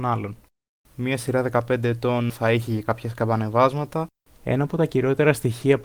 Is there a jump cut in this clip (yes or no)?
yes